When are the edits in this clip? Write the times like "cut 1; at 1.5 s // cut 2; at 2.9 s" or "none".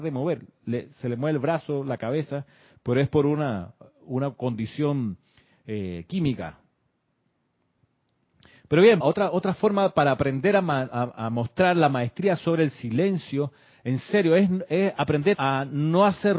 cut 1; at 9.0 s // cut 2; at 15.3 s